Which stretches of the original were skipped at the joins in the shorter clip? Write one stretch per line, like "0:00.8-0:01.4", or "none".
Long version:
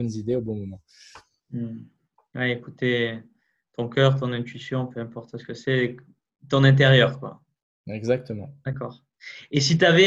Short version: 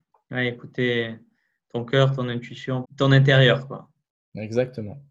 0:04.9-0:06.4